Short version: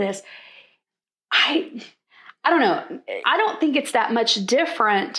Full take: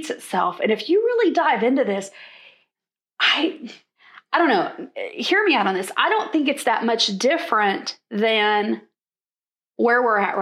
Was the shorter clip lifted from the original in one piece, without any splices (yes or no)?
no